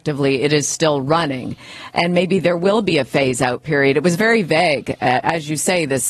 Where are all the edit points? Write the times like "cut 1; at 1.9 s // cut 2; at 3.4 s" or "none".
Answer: none